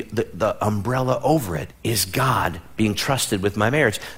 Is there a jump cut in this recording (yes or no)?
yes